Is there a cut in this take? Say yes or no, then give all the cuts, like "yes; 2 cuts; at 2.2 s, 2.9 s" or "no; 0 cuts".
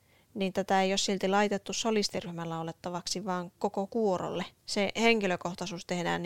yes; 1 cut; at 4.6 s